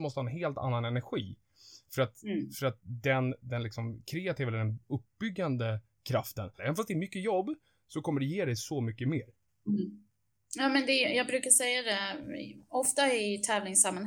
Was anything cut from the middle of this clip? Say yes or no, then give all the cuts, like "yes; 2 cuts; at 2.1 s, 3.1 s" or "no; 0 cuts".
yes; 1 cut; at 6.6 s